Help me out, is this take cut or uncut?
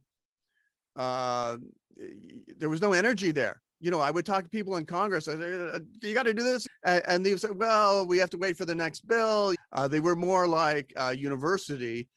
cut